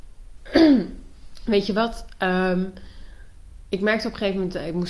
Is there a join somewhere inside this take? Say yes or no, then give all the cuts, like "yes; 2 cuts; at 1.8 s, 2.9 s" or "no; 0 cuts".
no; 0 cuts